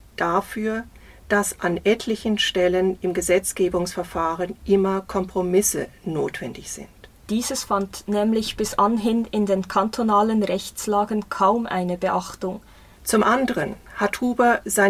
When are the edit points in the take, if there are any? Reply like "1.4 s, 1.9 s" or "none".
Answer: 7.3 s, 13.0 s

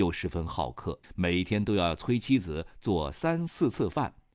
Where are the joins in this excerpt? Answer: 1.0 s

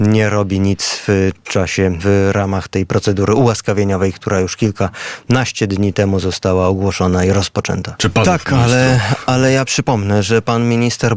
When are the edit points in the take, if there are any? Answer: 2.0 s, 8.0 s

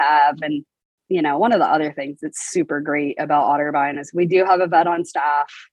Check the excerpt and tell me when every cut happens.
1.0 s

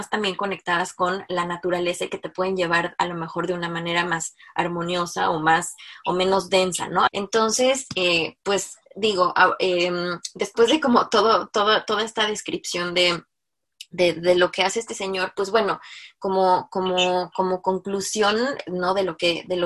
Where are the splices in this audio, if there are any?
7.1 s

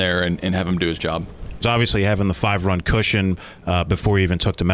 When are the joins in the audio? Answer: 1.6 s

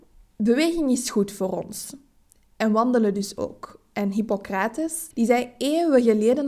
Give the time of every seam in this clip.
5.1 s

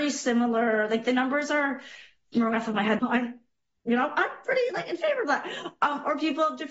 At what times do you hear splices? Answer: 3.0 s

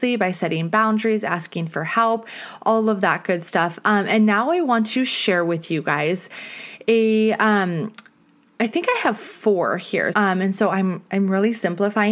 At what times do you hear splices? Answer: 10.1 s

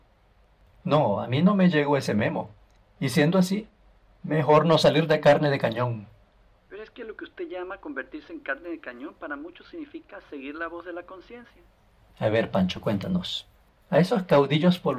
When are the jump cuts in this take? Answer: none

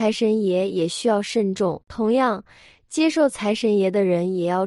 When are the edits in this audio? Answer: 1.8 s

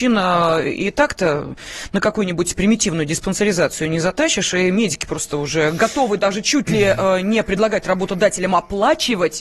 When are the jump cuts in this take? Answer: none

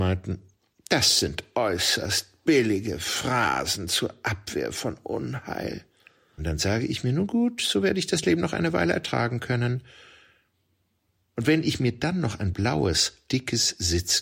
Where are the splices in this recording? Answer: 6.4 s, 13.3 s

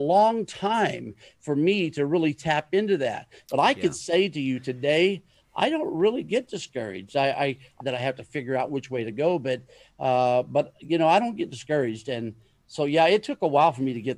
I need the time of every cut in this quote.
7.8 s

